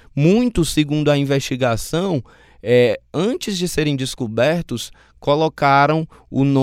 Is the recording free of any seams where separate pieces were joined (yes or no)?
yes